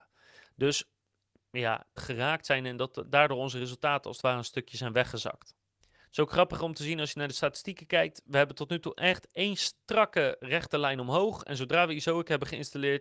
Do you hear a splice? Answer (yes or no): yes